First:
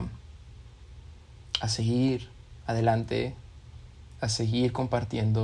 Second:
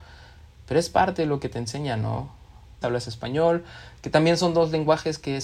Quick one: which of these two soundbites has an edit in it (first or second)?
second